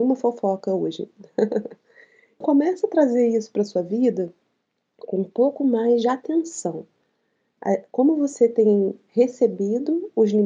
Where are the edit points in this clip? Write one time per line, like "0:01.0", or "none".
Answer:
0:02.4

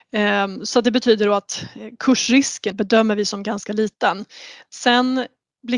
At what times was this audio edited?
0:02.7
0:04.6

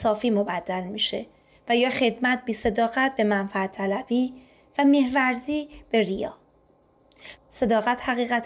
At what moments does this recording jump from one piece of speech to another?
0:07.4

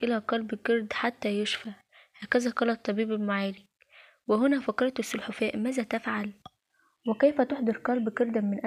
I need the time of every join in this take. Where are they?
none

